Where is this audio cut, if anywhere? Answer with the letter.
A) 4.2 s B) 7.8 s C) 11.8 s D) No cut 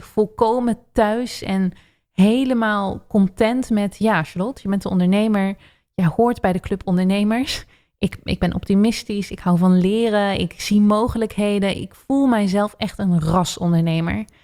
D